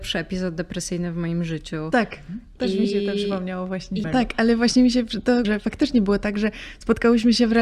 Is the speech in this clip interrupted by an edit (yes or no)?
yes